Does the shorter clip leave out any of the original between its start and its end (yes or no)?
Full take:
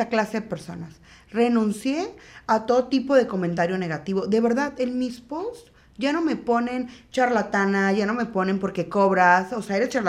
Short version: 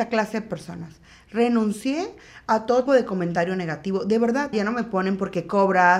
yes